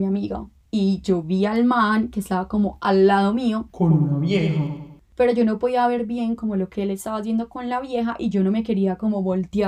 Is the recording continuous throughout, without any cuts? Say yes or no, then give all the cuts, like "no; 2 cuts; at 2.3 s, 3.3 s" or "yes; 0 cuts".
yes; 0 cuts